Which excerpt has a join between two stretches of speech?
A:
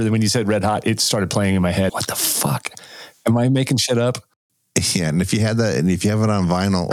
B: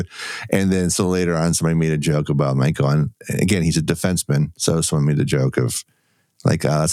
A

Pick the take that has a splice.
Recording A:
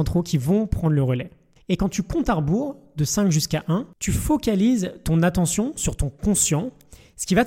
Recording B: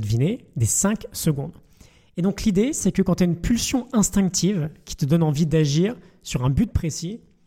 A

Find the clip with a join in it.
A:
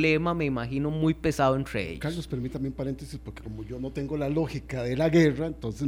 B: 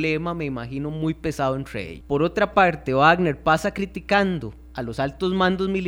B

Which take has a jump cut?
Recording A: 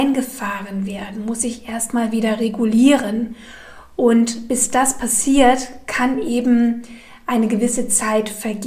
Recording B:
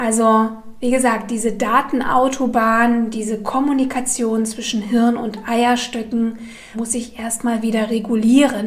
B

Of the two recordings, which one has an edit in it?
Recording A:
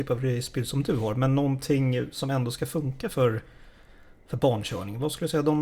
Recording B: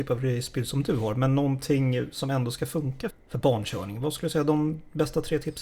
B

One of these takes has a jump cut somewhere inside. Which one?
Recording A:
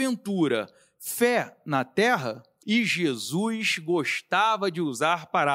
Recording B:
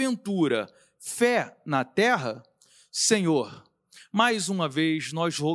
A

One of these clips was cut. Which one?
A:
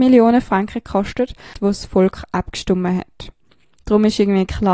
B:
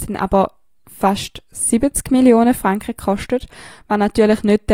A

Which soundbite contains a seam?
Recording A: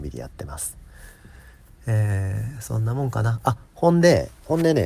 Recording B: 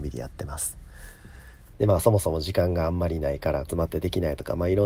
B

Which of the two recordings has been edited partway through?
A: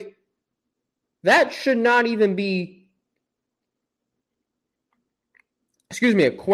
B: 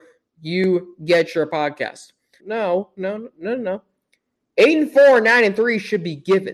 B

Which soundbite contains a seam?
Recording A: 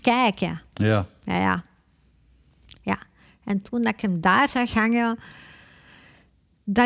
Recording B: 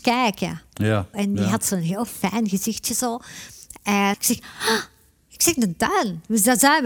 B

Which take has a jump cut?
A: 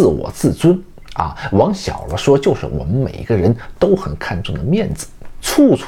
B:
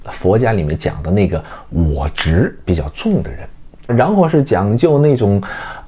B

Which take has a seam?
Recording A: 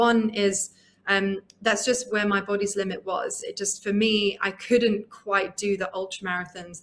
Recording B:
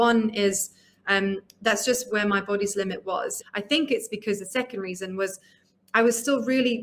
B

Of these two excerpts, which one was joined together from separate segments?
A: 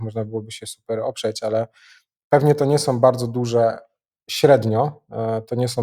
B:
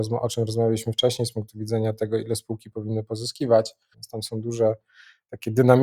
B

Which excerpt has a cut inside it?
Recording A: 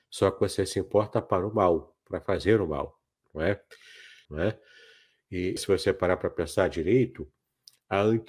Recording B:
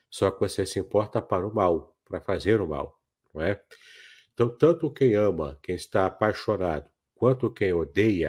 A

